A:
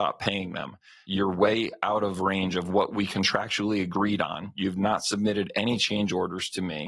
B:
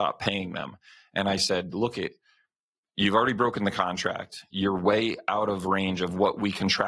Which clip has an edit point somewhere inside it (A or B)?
A